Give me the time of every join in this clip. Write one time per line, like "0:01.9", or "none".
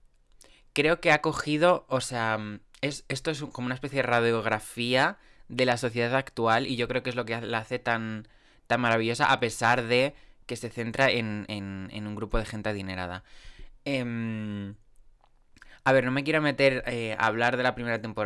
none